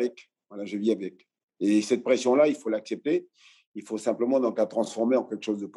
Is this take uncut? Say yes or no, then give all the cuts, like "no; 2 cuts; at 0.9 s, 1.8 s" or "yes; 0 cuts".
yes; 0 cuts